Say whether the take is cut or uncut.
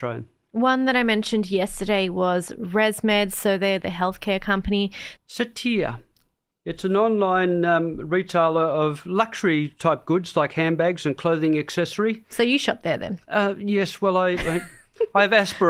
cut